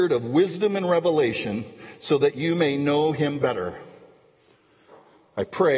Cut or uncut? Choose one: uncut